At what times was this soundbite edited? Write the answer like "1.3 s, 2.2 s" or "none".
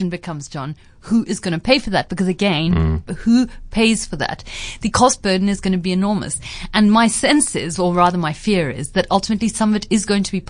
3.1 s